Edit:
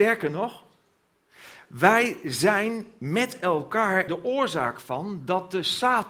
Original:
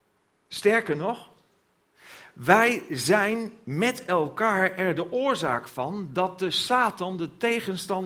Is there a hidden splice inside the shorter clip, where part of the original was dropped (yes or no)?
yes